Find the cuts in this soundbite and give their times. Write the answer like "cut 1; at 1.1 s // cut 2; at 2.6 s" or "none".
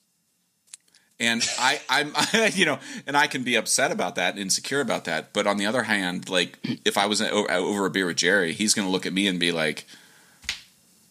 none